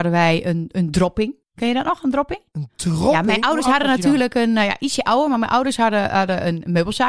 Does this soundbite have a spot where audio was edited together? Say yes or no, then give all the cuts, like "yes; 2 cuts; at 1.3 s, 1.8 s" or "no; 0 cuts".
yes; 1 cut; at 1.4 s